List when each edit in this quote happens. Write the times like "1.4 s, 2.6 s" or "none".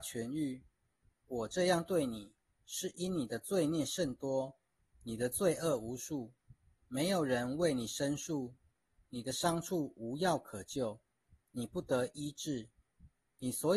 6.8 s